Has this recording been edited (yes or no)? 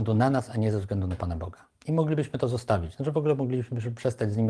yes